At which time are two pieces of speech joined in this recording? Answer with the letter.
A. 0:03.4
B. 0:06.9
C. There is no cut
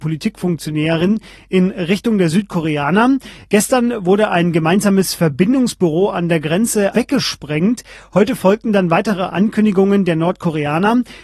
B